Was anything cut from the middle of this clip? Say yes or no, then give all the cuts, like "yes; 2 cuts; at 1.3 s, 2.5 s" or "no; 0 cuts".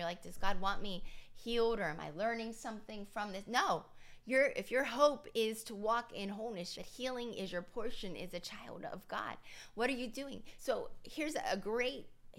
yes; 2 cuts; at 6.8 s, 10.6 s